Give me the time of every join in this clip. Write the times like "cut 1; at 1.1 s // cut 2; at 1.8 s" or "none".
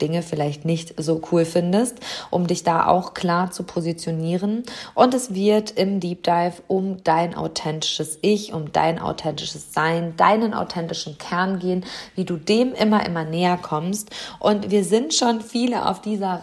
none

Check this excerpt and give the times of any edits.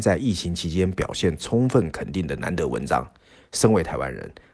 none

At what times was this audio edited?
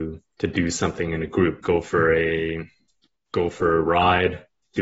cut 1; at 1.6 s

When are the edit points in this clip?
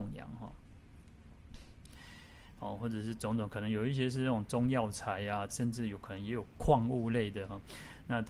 cut 1; at 2.6 s // cut 2; at 5.5 s

